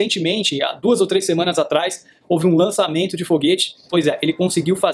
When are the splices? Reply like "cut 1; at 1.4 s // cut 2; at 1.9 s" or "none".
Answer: cut 1; at 3.9 s